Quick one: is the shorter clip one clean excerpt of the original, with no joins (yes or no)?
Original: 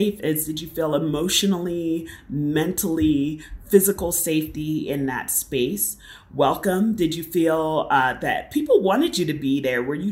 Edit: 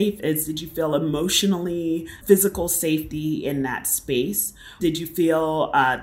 no